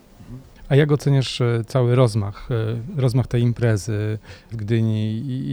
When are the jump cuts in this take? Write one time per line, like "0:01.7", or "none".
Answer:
0:04.5

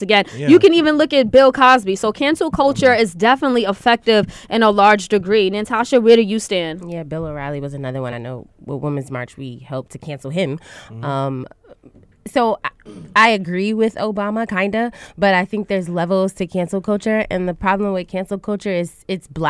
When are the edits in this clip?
none

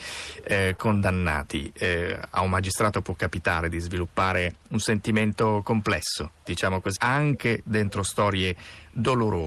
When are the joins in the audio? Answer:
0:04.6
0:07.0

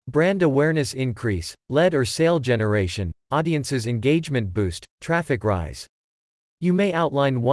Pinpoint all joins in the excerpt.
0:03.2

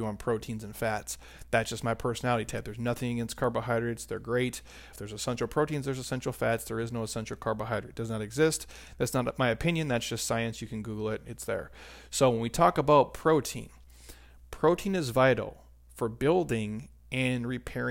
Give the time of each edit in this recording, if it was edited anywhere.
0:04.9

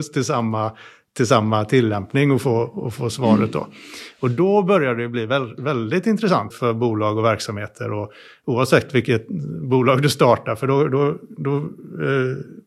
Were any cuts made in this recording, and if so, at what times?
0:06.5

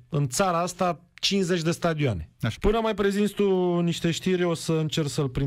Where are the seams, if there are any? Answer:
0:02.6

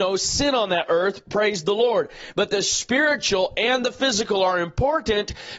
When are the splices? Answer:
none

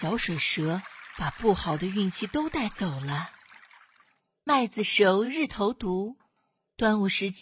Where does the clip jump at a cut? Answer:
none

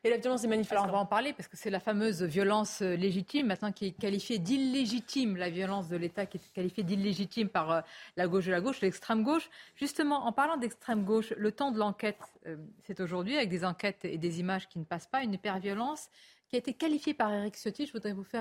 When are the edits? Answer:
none

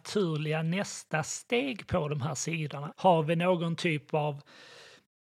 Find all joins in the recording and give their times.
0:02.9

